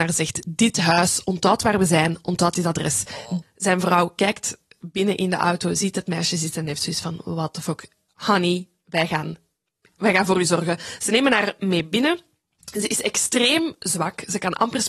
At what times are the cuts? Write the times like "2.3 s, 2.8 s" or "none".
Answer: 3.4 s